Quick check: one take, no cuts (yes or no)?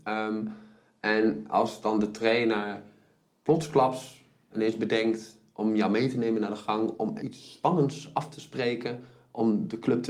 no